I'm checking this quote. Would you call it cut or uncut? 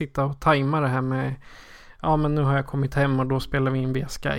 uncut